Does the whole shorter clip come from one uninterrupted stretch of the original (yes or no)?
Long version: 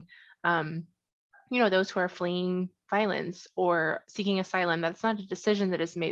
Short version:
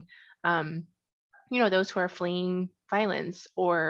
yes